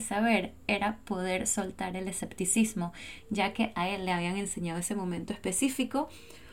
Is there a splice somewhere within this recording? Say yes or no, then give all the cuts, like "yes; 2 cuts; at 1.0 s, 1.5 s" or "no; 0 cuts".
no; 0 cuts